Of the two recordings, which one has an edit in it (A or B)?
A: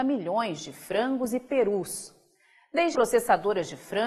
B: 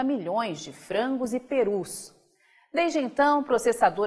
A